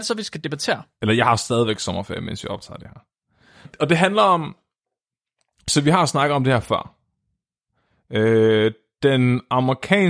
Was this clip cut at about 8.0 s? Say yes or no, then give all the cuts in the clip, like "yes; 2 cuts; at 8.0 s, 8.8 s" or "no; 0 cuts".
no; 2 cuts; at 1.0 s, 3.6 s